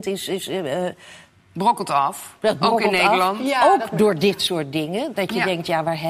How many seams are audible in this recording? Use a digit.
0